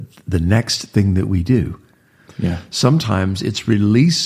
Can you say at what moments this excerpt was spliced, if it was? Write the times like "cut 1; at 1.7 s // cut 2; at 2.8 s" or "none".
cut 1; at 2.3 s